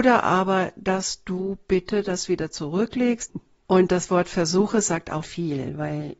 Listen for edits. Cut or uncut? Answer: cut